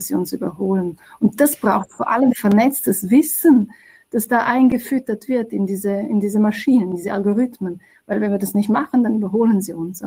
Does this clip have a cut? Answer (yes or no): no